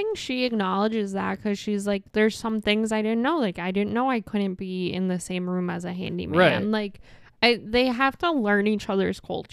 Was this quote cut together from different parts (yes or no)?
no